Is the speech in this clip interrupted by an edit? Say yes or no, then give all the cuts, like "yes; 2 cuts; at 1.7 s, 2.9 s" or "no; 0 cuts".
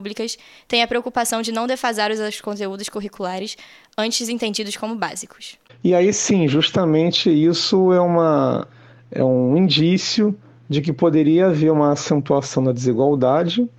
no; 0 cuts